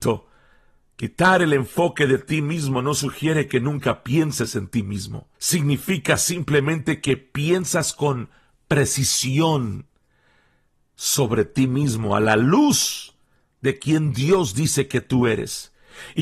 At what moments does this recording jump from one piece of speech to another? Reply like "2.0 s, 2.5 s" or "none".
5.3 s